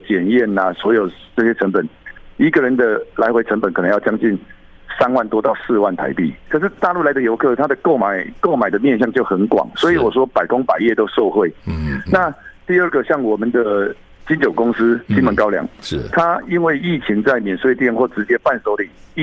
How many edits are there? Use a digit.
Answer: 1